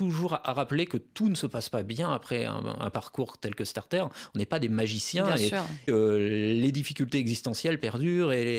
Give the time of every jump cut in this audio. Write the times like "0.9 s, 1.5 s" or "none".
5.9 s